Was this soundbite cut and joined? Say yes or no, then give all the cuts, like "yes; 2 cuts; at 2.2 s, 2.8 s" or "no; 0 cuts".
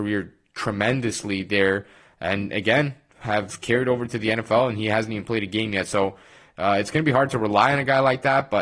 no; 0 cuts